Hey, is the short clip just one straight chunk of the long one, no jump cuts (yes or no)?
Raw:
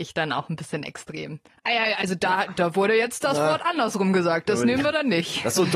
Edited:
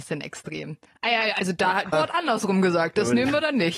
no